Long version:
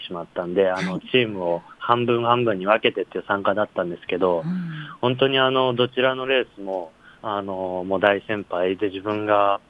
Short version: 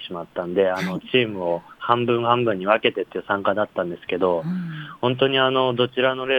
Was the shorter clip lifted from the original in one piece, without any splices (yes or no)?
yes